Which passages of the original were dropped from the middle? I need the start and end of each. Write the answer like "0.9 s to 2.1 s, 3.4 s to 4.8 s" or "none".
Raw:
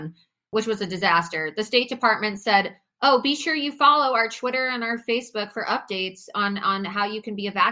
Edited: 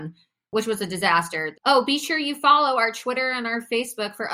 1.5 s to 2.9 s